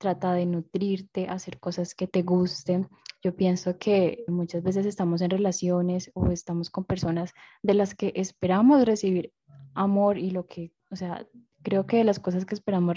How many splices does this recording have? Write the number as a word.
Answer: two